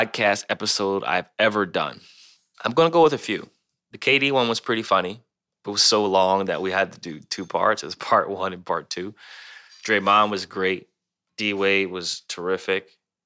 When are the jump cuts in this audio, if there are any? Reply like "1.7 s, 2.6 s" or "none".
none